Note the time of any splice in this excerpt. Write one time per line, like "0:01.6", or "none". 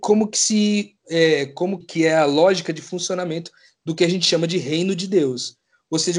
0:01.8